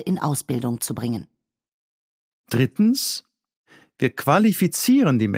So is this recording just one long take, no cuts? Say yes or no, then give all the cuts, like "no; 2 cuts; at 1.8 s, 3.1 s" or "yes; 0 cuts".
yes; 0 cuts